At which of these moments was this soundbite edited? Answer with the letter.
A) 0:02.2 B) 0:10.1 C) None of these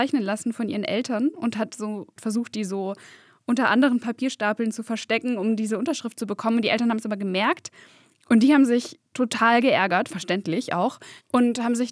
A